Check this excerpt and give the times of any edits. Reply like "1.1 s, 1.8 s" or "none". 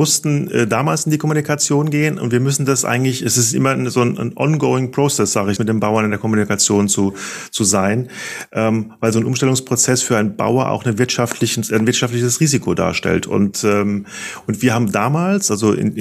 5.6 s

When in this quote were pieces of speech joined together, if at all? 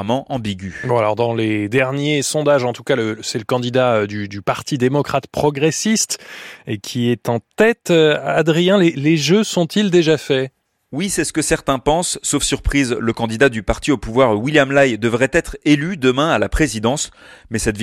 none

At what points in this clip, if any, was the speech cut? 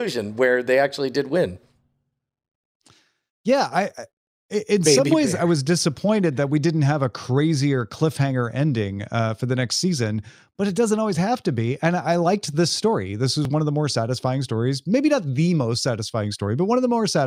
none

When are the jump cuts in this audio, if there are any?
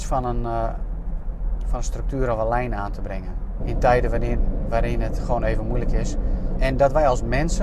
3.6 s, 6.6 s

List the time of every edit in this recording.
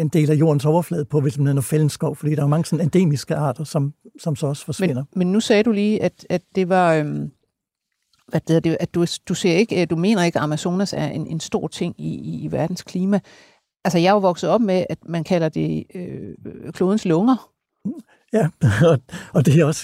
none

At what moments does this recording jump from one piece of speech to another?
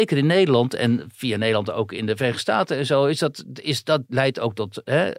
4.1 s

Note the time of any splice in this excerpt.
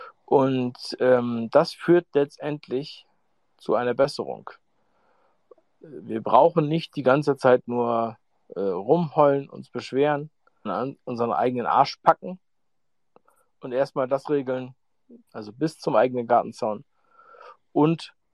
10.7 s, 15.3 s

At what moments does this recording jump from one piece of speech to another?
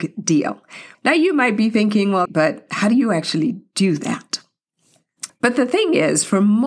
0.9 s, 2.3 s, 5.3 s

